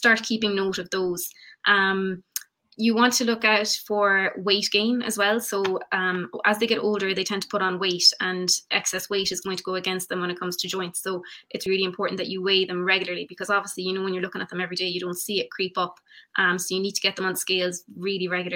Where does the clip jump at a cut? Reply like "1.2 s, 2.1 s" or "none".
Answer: 11.7 s